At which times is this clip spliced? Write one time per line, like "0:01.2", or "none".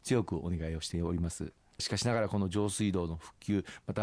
0:01.8